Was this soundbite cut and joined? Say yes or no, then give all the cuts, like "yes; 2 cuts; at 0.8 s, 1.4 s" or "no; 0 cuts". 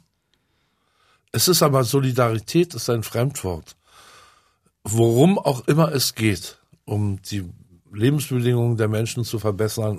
no; 0 cuts